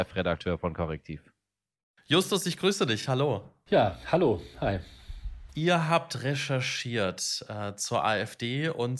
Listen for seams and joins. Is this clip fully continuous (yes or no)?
yes